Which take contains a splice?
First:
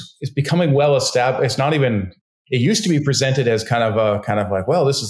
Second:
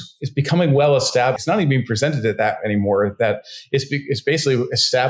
second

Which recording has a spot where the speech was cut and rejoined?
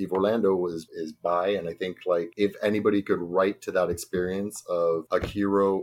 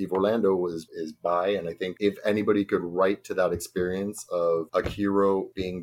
second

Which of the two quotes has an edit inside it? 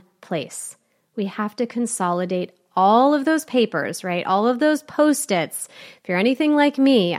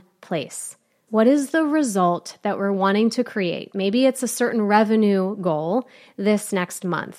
second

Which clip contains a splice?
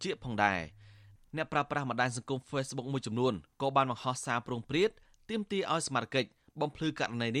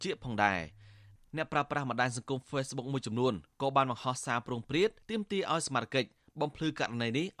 second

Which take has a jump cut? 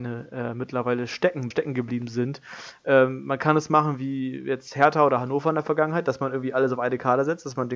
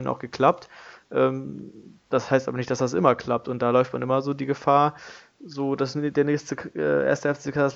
first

